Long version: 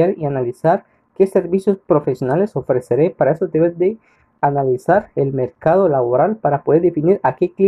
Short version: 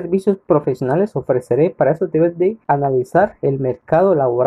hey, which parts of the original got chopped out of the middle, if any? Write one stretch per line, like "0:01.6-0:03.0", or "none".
0:04.0-0:04.4